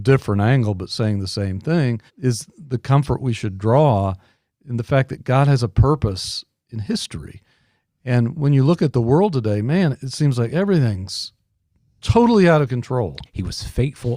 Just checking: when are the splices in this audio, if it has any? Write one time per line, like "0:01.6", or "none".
0:02.1
0:13.2